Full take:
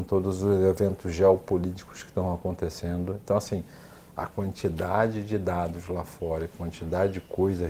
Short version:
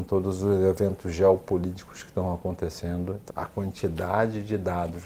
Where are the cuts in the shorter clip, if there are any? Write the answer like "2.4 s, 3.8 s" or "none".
3.3 s